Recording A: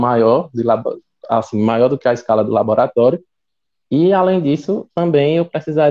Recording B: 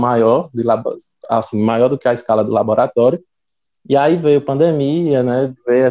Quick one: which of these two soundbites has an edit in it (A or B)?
B